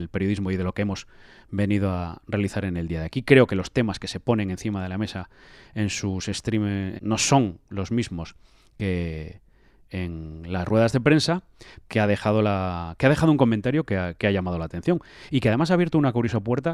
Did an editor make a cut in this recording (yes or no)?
yes